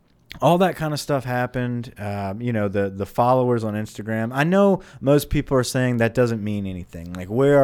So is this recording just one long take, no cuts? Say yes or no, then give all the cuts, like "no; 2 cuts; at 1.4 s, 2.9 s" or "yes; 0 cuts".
yes; 0 cuts